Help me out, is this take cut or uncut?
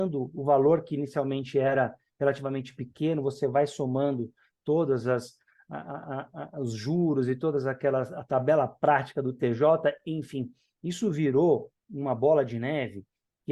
uncut